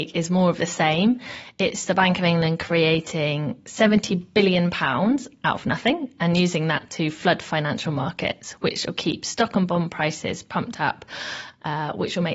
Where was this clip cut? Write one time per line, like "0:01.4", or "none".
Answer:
none